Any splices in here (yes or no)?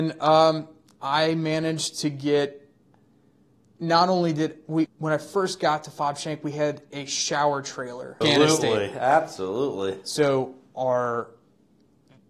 yes